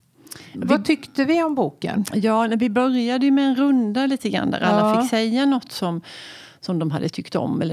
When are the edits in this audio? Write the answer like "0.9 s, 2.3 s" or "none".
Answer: none